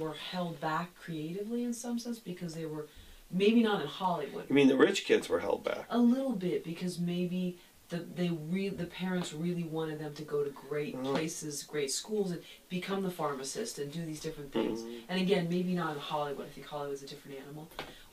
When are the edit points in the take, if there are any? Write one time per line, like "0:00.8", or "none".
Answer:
none